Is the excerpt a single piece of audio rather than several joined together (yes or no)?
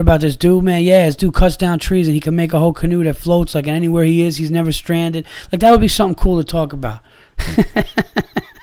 yes